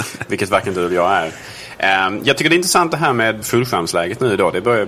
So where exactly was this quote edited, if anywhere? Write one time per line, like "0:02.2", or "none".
0:03.4